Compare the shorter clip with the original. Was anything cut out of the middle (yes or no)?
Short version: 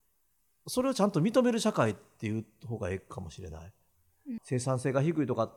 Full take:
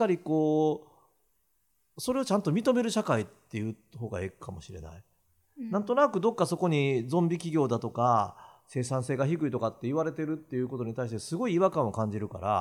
yes